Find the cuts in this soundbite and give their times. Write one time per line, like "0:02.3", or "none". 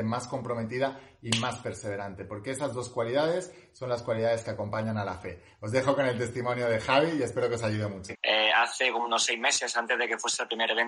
none